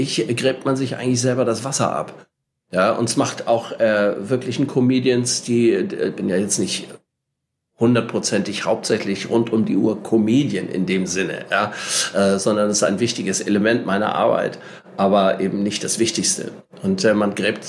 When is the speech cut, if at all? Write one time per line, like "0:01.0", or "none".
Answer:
none